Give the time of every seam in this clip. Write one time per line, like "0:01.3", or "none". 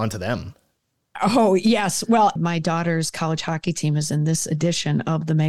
0:02.4